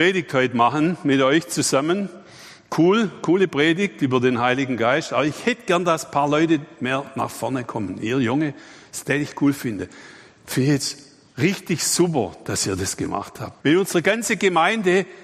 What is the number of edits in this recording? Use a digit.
1